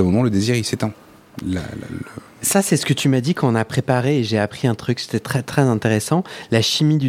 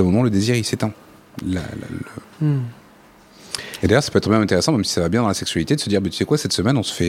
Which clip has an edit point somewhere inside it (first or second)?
second